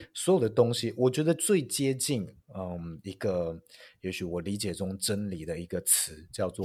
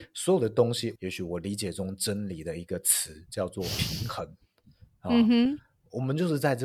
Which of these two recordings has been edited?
second; 1 cut; at 1.0 s

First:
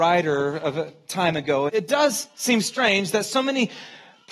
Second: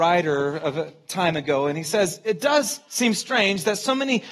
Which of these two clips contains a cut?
first; 1 cut; at 1.7 s

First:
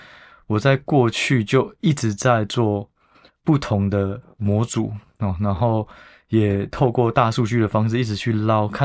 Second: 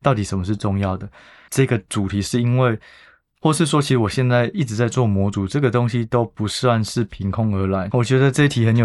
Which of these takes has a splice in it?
second; 2 cuts; at 1.5 s, 7.9 s

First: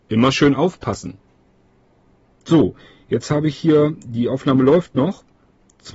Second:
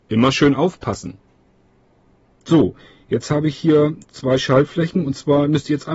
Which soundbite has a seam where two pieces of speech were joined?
second; 1 cut; at 4.0 s

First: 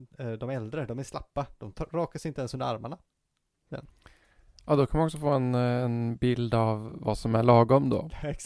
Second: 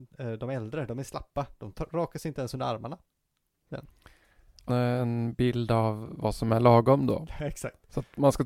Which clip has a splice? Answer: second; 1 cut; at 4.7 s

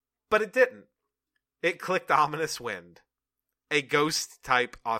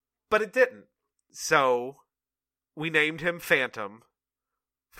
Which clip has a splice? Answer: second; 1 cut; at 1.1 s

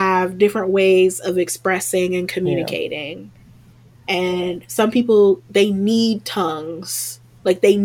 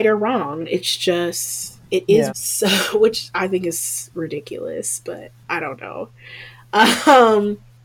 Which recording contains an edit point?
second; 2 cuts; at 2.3 s, 5.4 s

